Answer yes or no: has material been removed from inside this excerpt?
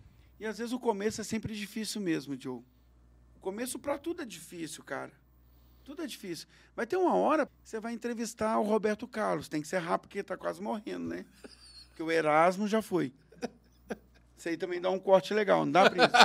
yes